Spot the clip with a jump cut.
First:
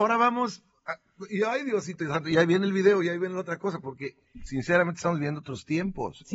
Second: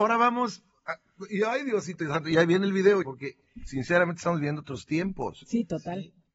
second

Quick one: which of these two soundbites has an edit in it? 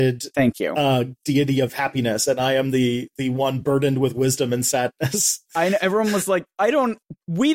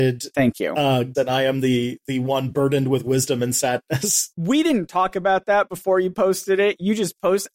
second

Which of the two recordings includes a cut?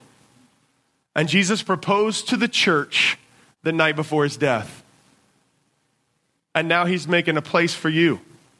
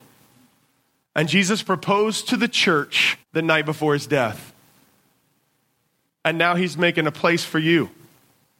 second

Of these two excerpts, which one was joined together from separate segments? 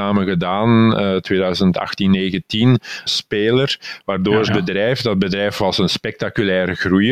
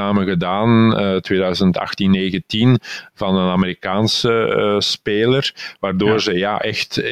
first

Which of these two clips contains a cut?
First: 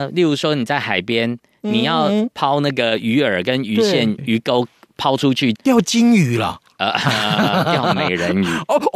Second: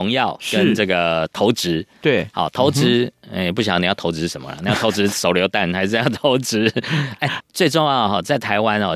first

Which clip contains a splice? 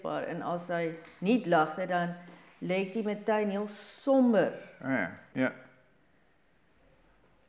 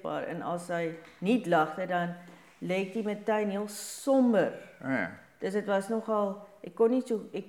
first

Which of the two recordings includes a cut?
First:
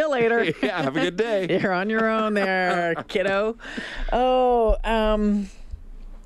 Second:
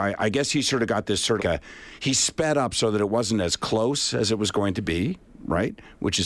second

